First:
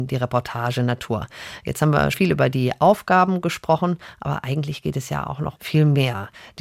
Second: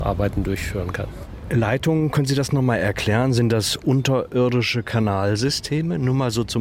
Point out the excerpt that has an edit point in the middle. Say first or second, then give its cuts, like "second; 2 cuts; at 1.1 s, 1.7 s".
first; 2 cuts; at 2.1 s, 5.6 s